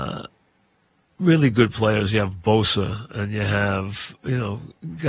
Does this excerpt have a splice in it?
no; 0 cuts

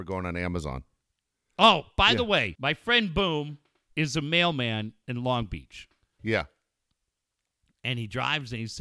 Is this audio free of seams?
no; 2 cuts; at 2.6 s, 6.2 s

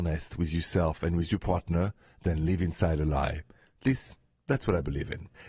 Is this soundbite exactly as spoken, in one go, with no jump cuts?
yes; 0 cuts

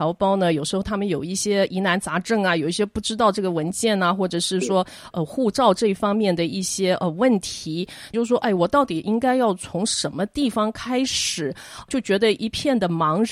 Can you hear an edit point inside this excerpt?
yes; 2 cuts; at 5.1 s, 8.1 s

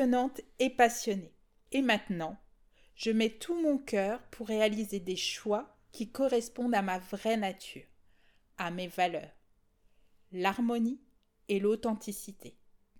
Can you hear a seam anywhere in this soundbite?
yes; 1 cut; at 1.7 s

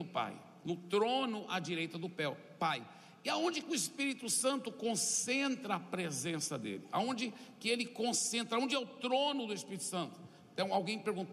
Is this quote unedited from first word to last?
yes; 0 cuts

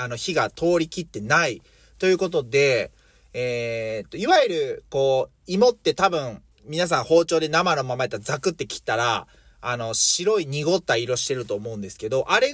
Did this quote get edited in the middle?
yes; 1 cut; at 6.5 s

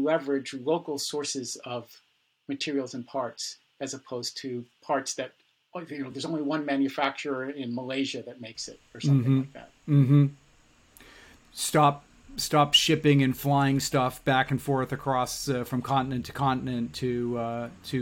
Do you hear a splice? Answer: no; 0 cuts

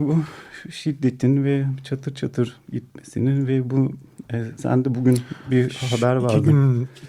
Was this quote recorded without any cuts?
yes; 0 cuts

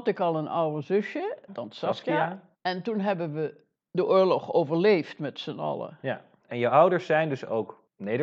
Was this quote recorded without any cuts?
no; 3 cuts; at 1.5 s, 2.5 s, 6.4 s

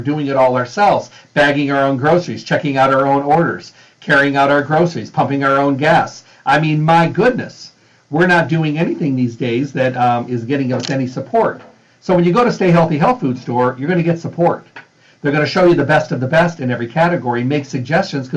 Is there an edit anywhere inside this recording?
no; 0 cuts

